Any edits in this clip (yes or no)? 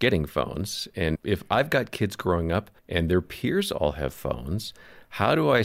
yes